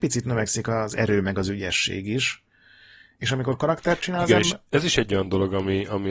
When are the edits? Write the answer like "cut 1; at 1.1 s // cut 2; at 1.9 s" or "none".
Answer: none